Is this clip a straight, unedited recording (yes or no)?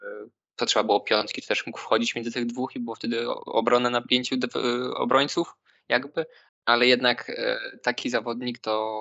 no